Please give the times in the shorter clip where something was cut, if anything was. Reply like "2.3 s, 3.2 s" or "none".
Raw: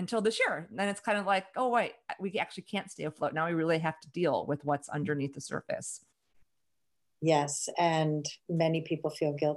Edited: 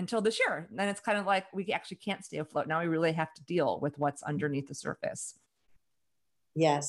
1.5 s